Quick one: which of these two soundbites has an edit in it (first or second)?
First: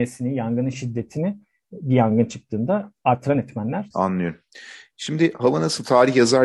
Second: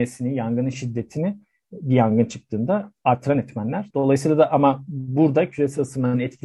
first